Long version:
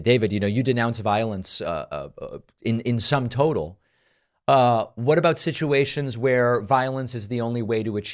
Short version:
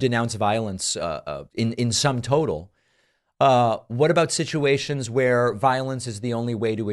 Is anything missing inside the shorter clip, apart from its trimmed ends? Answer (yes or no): yes